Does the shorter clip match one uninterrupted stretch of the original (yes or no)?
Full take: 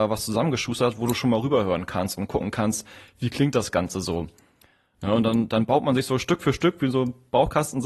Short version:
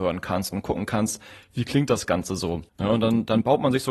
no